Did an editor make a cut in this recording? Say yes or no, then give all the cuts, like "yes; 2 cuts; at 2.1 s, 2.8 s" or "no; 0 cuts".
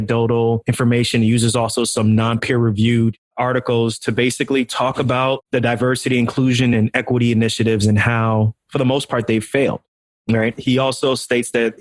no; 0 cuts